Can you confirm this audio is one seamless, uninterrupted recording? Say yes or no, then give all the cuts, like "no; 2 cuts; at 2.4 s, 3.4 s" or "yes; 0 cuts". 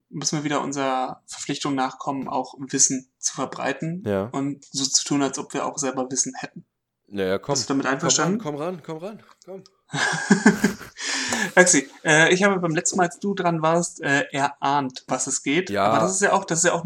no; 1 cut; at 15.1 s